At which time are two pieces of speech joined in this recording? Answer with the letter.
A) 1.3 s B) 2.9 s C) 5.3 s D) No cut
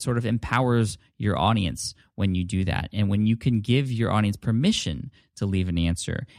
D